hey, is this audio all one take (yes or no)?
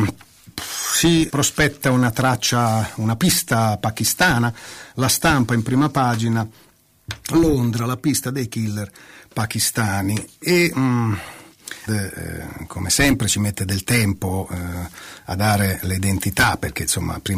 no